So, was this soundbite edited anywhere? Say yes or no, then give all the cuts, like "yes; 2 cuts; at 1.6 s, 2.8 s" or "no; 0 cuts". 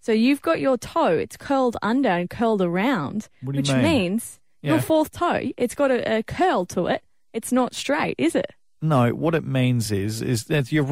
no; 0 cuts